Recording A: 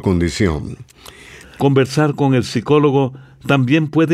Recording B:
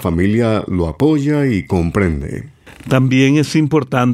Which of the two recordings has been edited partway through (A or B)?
A